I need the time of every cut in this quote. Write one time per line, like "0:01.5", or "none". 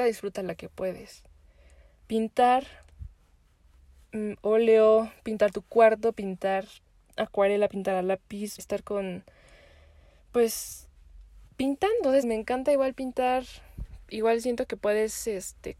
0:08.6
0:12.2